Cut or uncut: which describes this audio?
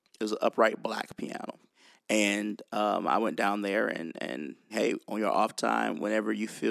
cut